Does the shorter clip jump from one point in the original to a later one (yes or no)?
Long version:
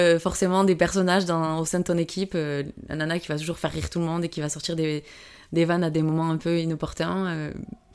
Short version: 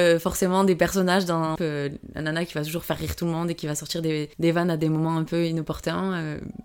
yes